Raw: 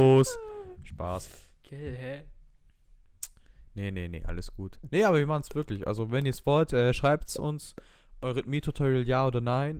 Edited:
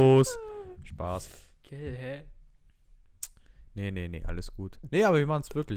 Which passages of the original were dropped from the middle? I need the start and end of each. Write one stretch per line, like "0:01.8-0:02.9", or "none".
none

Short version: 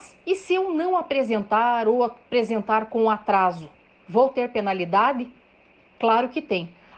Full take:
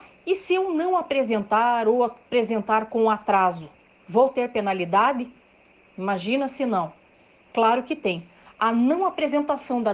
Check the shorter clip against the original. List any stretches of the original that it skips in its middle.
0:05.8-0:07.3

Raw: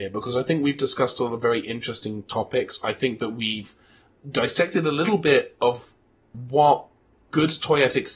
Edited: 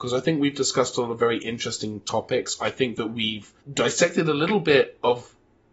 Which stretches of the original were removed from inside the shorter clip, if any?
0:03.8-0:04.2

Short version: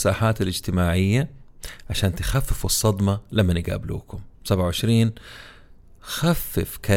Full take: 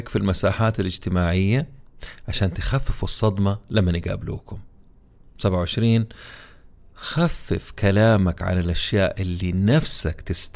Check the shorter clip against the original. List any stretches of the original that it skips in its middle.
0:04.7-0:05.3

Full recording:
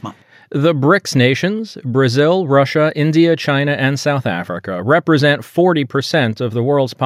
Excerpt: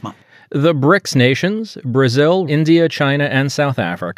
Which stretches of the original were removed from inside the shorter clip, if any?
0:02.5-0:02.9

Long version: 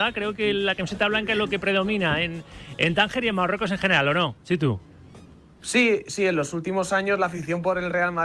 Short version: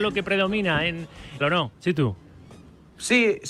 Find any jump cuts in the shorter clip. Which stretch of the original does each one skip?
0:02.8-0:04.0

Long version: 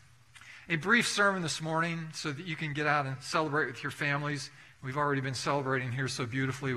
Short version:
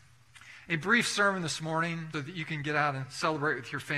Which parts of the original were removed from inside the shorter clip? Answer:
0:02.1-0:02.2

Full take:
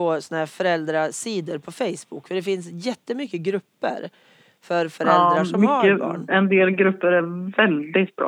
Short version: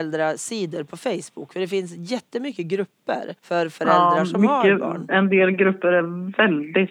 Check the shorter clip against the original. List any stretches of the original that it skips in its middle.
0:04.1-0:04.6

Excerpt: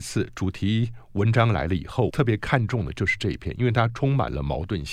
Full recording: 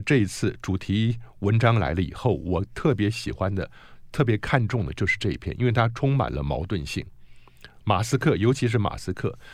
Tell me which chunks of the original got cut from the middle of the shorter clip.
0:02.4-0:04.1

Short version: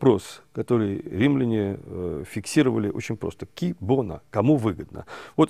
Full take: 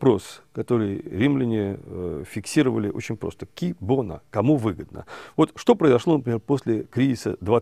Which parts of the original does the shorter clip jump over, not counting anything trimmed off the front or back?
none

